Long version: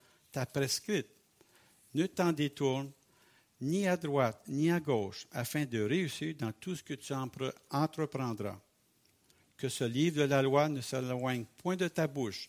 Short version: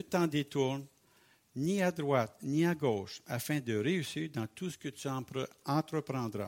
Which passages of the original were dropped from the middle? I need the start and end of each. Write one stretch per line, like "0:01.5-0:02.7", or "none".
none